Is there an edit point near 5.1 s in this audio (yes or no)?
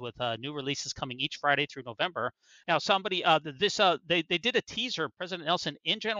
no